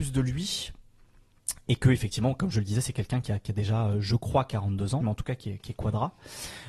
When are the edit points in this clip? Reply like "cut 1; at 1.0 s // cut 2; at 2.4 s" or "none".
cut 1; at 5.0 s